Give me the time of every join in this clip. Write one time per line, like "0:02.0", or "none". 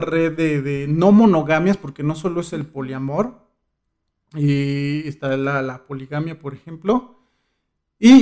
none